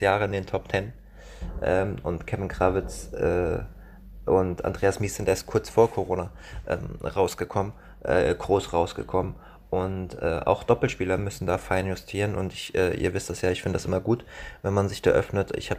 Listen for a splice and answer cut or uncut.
uncut